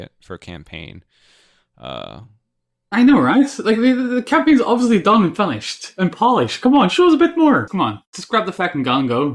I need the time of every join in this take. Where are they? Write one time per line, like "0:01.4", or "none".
0:07.7